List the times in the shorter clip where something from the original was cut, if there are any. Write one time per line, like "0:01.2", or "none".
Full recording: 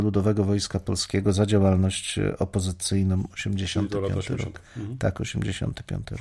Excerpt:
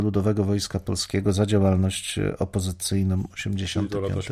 none